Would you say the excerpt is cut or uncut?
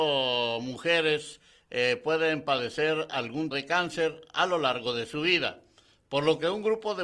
cut